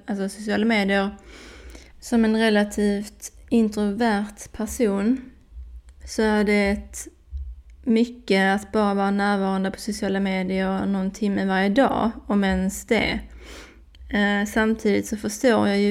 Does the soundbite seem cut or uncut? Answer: cut